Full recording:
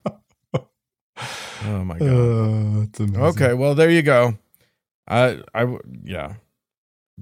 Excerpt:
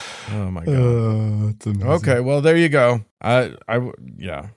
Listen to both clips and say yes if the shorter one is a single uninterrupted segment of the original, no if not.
no